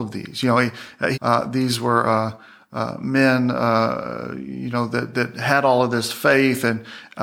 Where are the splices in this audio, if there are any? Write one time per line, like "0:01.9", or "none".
0:01.1